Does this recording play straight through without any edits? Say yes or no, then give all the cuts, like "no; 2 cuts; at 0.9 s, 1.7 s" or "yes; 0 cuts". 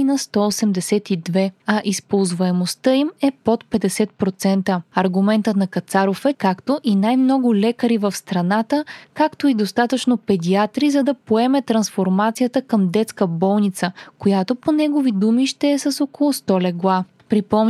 no; 1 cut; at 6.3 s